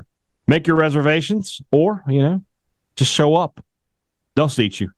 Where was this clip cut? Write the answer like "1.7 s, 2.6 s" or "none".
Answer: none